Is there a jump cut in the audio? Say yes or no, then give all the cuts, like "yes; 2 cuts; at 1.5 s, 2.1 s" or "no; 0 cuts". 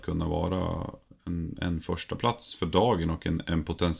no; 0 cuts